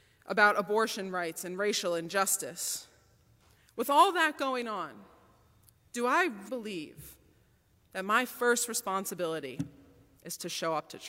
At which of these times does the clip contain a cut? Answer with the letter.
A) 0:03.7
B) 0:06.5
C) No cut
B